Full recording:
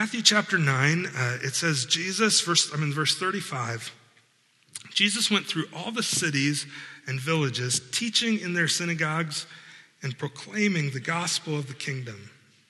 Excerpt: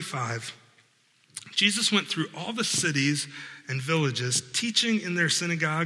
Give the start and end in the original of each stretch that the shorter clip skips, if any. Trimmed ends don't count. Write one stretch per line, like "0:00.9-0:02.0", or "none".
none